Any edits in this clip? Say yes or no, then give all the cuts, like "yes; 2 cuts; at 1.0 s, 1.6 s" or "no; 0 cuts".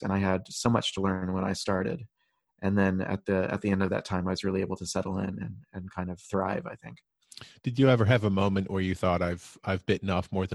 no; 0 cuts